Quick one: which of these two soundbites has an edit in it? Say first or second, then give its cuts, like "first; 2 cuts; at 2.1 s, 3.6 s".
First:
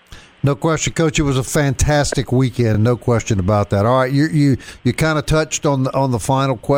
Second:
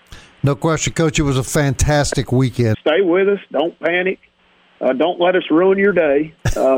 second; 1 cut; at 2.7 s